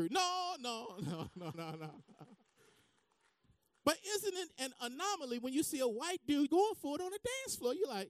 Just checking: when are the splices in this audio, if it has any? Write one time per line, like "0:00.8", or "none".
0:01.5
0:06.5